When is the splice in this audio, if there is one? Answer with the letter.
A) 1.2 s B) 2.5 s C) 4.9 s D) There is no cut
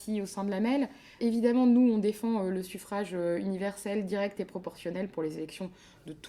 A